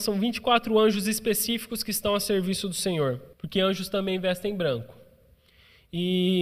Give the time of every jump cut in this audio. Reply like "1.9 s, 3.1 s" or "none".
3.3 s